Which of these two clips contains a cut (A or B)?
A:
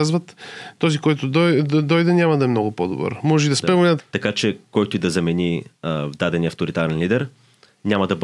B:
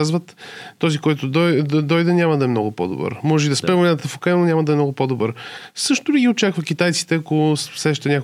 A